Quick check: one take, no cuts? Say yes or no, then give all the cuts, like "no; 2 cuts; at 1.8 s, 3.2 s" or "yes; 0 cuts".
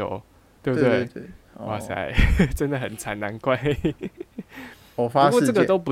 no; 1 cut; at 1.5 s